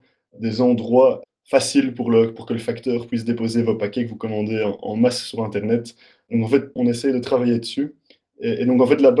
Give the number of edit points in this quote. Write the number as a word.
one